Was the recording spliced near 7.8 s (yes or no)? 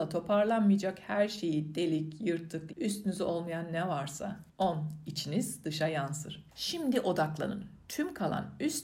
no